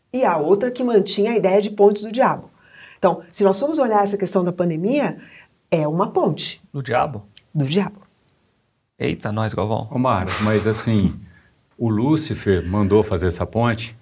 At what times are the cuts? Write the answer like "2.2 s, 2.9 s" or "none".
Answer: none